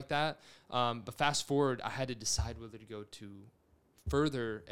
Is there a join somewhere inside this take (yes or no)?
no